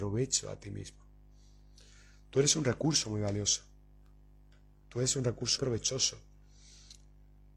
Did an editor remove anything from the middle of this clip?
yes; 1 cut; at 5.6 s

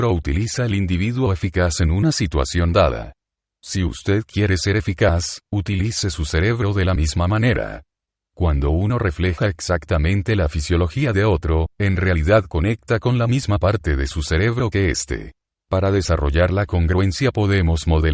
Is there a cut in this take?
yes; 1 cut; at 15.6 s

